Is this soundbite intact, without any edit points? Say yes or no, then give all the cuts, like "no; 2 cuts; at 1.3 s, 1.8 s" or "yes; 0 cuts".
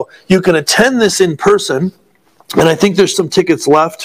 no; 1 cut; at 3.1 s